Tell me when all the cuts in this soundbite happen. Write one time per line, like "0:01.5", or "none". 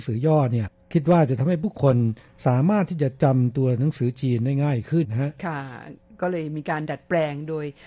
0:05.0